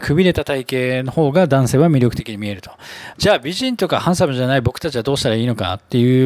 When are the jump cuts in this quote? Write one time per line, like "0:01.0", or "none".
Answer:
0:03.1